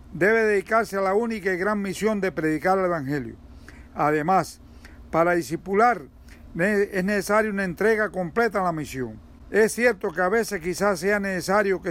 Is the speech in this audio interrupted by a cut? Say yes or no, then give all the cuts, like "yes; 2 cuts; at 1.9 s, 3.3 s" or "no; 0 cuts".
no; 0 cuts